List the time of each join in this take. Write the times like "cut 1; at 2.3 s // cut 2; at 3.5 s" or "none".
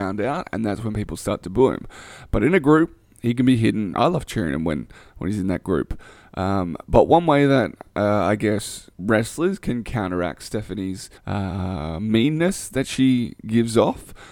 cut 1; at 3.9 s // cut 2; at 8.9 s // cut 3; at 11.2 s